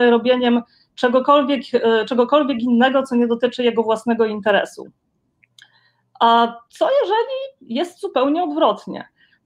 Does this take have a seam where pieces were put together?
no; 0 cuts

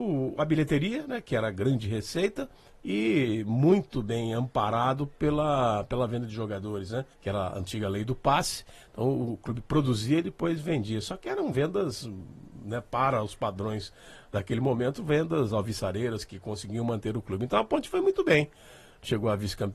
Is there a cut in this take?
yes; 1 cut; at 7.1 s

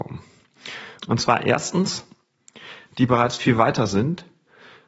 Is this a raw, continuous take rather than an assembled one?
no; 2 cuts; at 1.0 s, 2.9 s

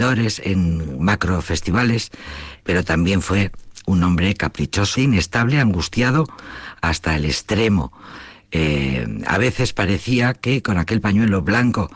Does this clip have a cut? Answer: yes; 2 cuts; at 2.6 s, 5.0 s

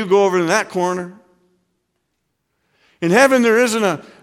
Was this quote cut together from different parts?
no; 0 cuts

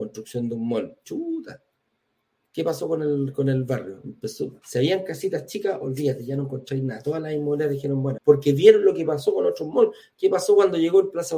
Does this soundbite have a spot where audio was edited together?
yes; 2 cuts; at 4.6 s, 8.2 s

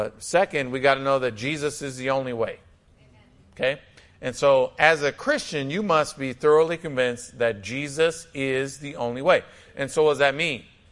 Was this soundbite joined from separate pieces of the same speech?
no; 0 cuts

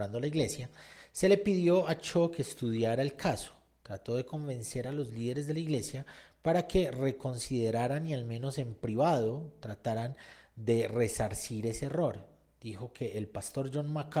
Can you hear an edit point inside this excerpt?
no; 0 cuts

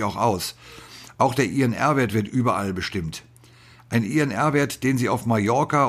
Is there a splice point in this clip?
no; 0 cuts

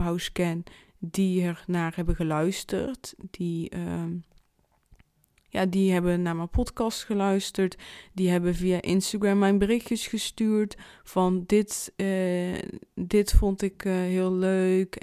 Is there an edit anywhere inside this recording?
no; 0 cuts

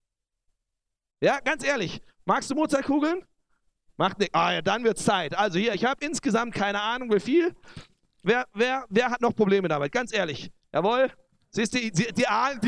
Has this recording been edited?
no; 0 cuts

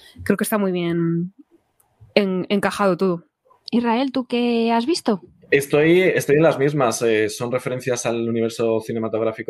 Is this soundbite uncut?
yes; 0 cuts

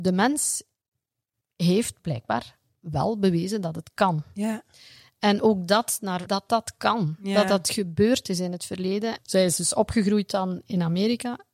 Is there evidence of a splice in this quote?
yes; 2 cuts; at 6.3 s, 9.2 s

